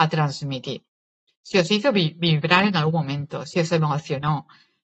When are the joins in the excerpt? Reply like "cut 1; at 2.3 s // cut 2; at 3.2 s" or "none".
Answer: cut 1; at 1.3 s